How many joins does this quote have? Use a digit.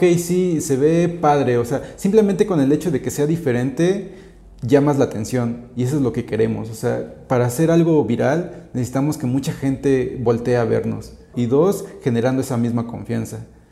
1